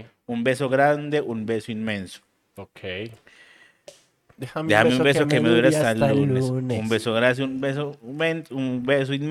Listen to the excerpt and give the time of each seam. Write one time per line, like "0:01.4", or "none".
none